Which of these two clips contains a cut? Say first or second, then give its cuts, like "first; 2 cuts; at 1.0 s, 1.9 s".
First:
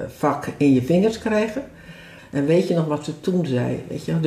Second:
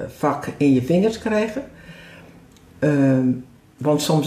first; 1 cut; at 2.2 s